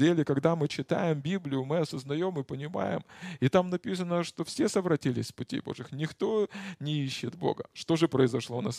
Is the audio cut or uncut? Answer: uncut